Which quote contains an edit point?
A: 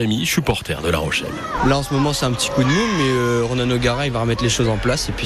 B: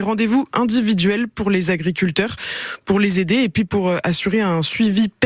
A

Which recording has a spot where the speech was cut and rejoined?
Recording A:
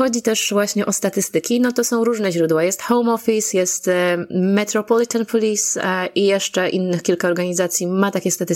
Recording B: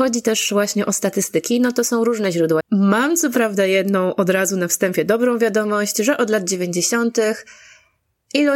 B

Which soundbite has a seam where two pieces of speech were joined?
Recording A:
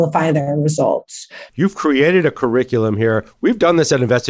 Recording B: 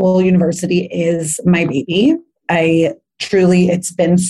A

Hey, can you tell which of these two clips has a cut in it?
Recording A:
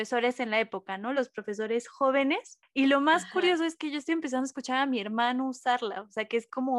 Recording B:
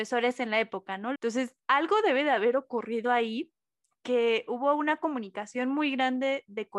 B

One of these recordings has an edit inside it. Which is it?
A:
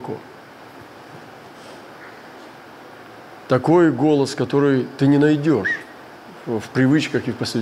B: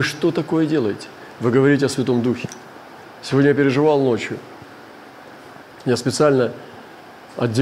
B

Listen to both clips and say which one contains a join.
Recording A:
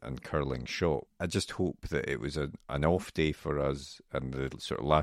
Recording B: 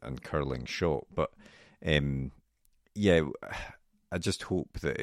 A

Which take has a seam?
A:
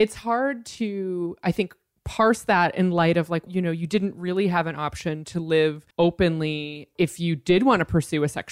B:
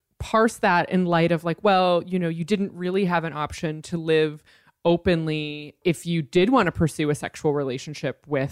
A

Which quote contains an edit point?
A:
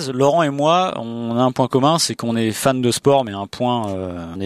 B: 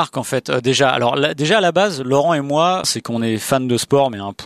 B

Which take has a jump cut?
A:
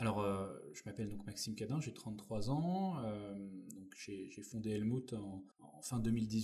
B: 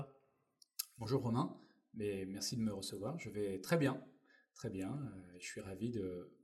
A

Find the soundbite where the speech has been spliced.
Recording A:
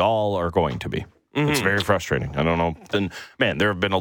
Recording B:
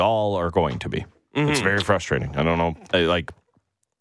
A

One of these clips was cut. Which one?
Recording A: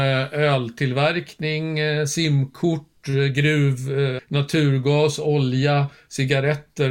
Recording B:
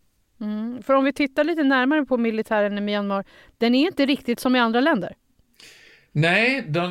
A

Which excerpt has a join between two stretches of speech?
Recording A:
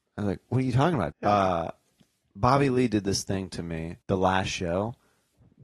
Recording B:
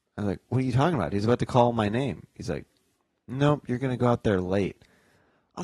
A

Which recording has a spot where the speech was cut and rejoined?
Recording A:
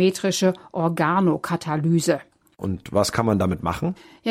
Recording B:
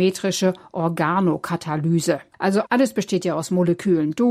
B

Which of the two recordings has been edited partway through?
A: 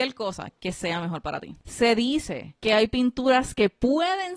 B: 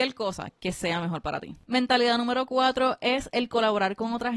A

